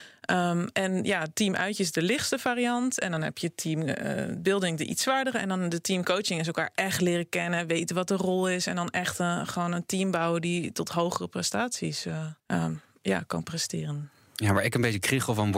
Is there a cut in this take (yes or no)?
yes